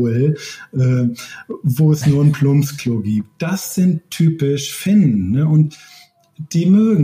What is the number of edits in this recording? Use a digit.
0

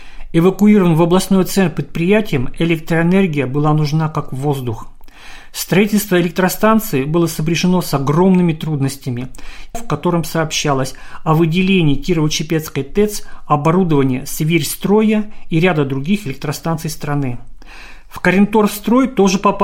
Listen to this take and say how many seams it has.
1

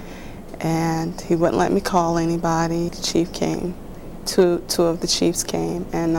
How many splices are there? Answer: 1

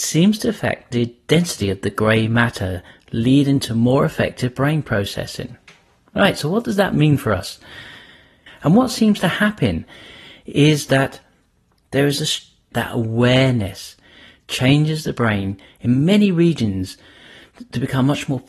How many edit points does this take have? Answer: 2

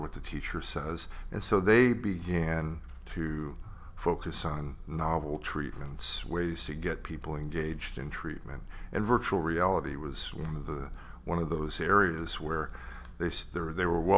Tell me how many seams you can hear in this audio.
1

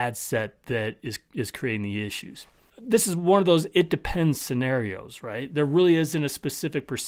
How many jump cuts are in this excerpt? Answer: 1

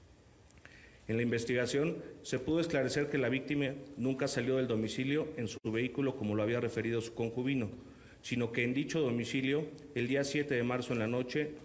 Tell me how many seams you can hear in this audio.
1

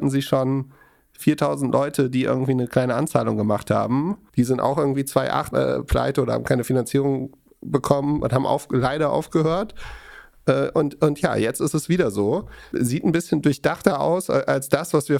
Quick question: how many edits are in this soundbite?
3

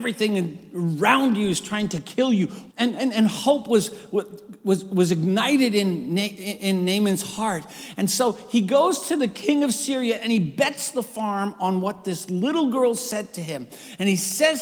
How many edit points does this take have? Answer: 1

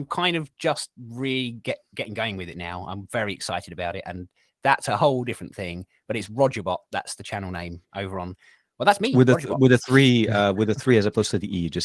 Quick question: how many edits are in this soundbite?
0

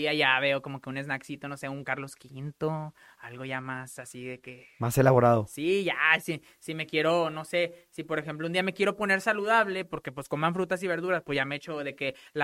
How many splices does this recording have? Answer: 0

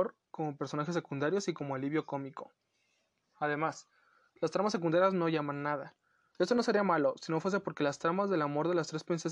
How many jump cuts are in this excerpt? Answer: 1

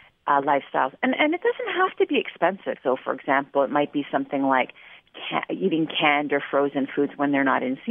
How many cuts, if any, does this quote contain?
1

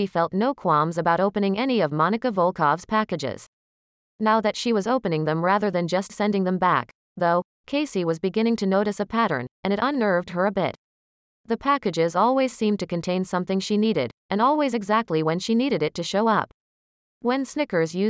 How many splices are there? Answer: 0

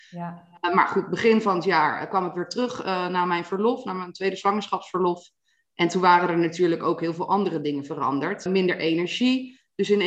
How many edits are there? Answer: 1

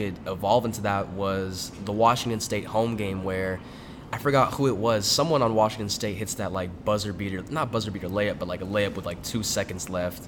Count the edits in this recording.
0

